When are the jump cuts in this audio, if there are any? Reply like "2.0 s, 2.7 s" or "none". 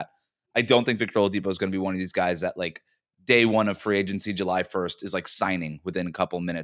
none